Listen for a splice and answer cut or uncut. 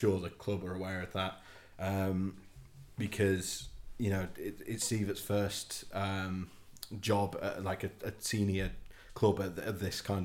uncut